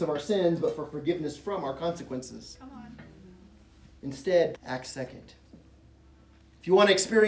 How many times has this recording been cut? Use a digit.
1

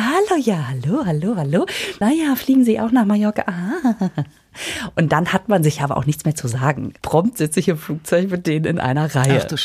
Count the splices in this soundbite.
2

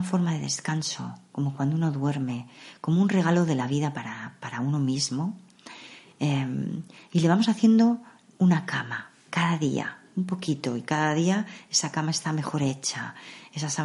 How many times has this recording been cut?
0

